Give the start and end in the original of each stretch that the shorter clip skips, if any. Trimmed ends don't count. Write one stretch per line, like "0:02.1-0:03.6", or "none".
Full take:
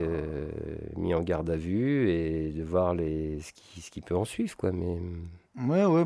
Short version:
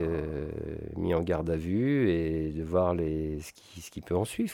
none